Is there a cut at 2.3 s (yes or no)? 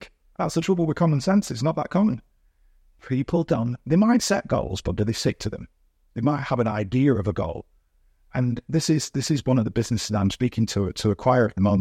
no